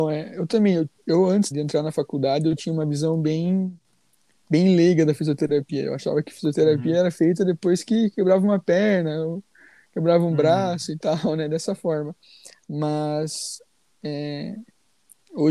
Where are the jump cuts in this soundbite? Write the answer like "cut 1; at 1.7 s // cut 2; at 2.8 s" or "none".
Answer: cut 1; at 1.5 s